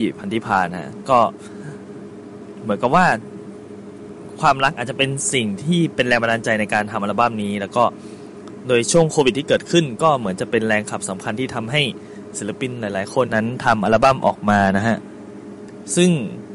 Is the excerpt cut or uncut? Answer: cut